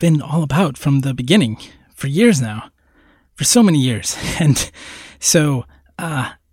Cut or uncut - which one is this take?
uncut